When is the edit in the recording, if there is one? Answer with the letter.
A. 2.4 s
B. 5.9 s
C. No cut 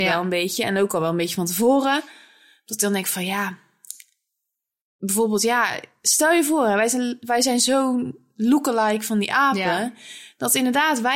C